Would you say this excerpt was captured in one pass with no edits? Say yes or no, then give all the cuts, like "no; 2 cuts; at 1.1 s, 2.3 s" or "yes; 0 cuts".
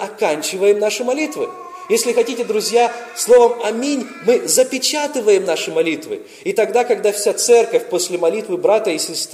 yes; 0 cuts